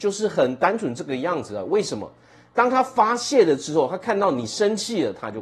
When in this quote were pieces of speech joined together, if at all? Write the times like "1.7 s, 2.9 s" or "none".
none